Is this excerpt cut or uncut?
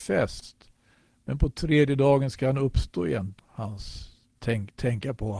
cut